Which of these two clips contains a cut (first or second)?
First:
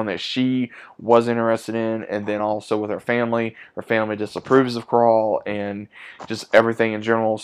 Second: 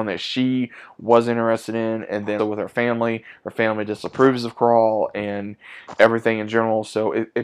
second